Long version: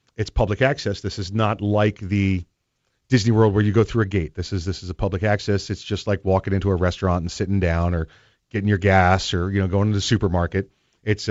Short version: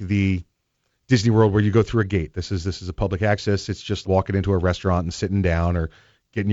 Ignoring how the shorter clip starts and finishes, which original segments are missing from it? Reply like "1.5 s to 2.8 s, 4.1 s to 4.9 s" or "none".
6.0 s to 6.2 s